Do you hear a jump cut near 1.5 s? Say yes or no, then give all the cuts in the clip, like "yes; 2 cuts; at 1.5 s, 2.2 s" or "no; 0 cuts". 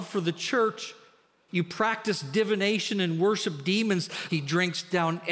yes; 2 cuts; at 1.5 s, 4.3 s